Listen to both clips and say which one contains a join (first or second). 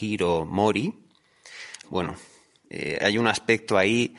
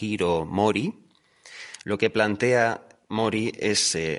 first